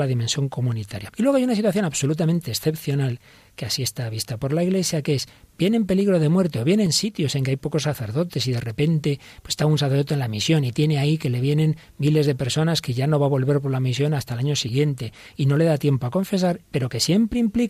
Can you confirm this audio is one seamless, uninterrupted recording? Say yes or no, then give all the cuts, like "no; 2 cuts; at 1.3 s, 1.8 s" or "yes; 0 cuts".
no; 2 cuts; at 1.1 s, 16.6 s